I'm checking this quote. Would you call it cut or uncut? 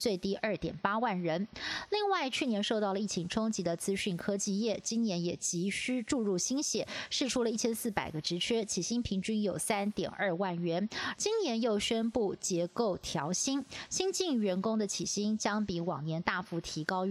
cut